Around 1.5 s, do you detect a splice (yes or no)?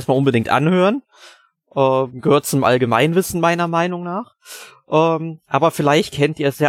no